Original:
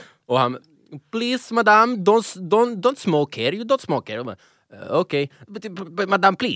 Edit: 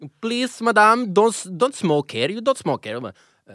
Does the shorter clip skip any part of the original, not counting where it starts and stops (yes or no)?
yes